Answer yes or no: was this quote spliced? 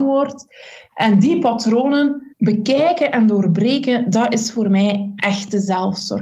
yes